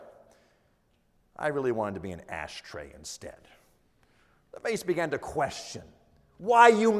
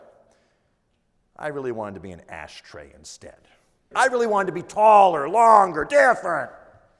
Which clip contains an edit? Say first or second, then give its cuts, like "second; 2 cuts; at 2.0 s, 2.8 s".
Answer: second; 1 cut; at 3.9 s